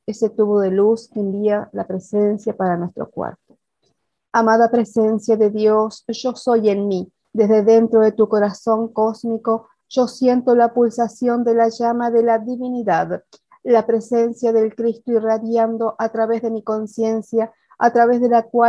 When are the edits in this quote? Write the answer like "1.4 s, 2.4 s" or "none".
7.2 s